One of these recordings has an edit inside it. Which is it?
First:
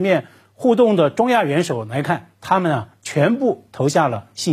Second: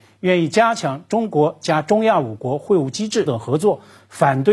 second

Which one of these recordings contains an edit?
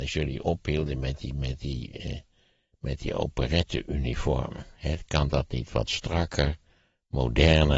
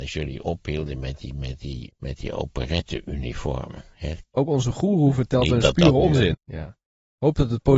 second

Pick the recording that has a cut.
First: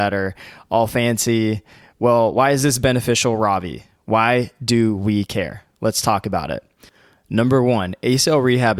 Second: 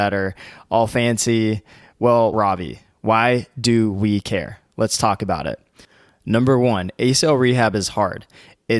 second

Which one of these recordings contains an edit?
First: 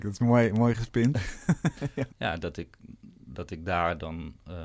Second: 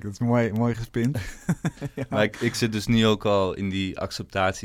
first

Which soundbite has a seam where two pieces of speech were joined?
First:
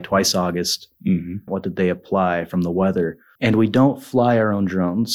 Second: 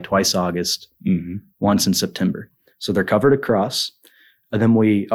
first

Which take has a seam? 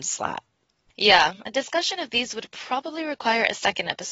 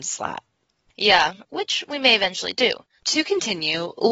second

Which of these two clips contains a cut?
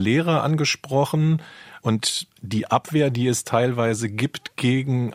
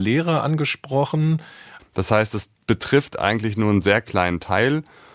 second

